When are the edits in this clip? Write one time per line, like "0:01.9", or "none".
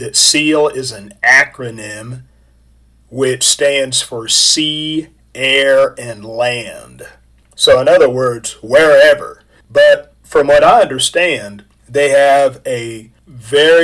0:09.6